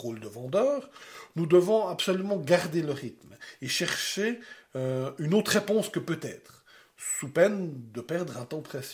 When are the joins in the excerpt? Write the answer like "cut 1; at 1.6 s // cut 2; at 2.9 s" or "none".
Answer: none